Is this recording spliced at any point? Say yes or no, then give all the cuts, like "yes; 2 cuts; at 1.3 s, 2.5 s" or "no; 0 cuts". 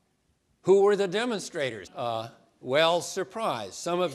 yes; 1 cut; at 1.9 s